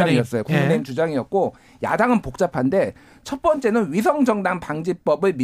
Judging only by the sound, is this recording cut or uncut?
uncut